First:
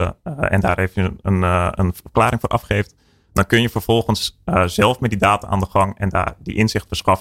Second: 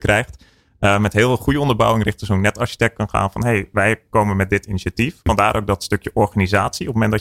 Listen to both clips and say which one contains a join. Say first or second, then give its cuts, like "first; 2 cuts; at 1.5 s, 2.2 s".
second; 1 cut; at 5.3 s